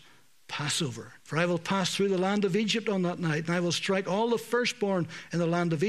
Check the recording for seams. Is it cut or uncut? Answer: cut